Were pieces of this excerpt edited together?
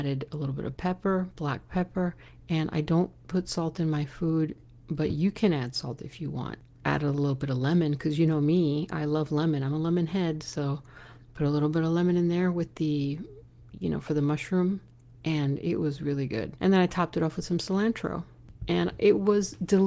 no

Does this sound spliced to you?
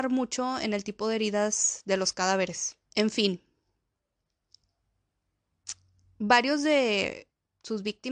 yes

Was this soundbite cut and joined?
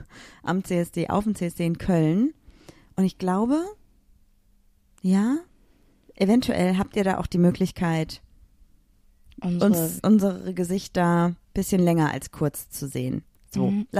yes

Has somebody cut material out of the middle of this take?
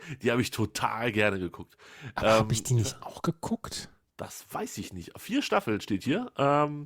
no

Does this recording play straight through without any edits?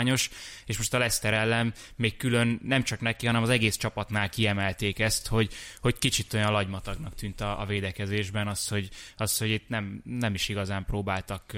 yes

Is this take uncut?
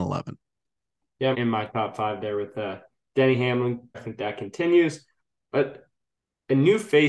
no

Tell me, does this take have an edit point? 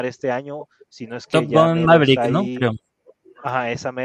no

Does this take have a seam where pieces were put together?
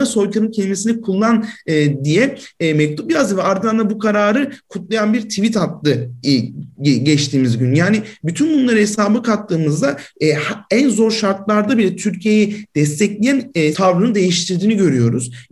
yes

